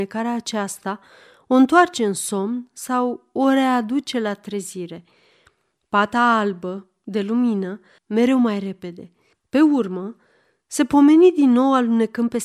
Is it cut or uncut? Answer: cut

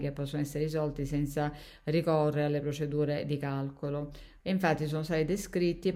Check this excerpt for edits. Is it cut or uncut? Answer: cut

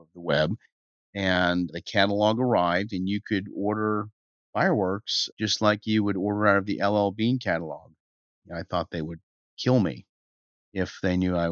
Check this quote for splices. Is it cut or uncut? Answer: cut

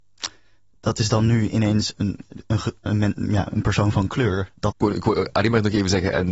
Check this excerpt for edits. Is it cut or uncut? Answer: cut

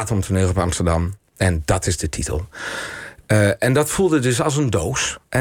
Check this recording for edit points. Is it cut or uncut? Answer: uncut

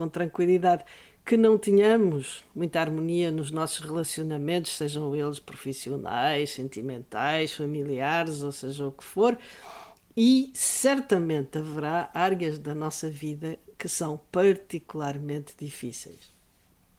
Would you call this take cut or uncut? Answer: uncut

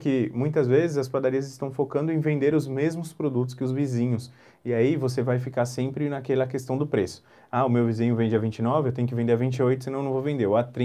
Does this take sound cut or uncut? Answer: uncut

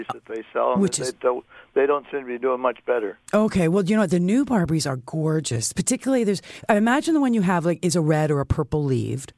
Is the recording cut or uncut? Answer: uncut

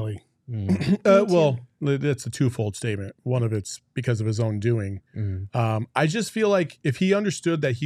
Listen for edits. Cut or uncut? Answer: cut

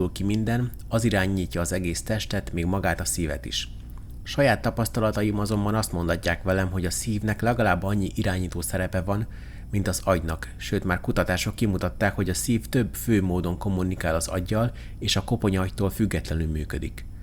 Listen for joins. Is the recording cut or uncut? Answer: uncut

